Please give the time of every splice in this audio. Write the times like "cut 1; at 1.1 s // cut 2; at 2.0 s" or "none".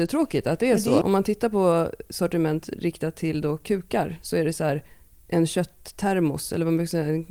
cut 1; at 1.0 s

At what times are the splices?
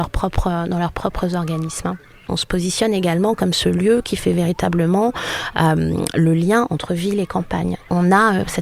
none

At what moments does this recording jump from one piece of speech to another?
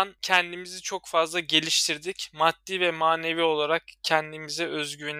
none

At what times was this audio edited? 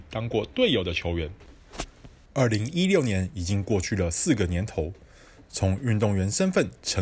none

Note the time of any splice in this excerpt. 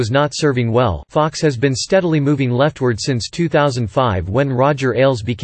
cut 1; at 1.0 s

